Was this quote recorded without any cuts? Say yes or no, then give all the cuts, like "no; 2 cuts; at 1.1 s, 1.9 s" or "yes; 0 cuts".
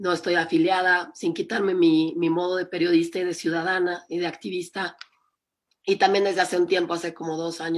yes; 0 cuts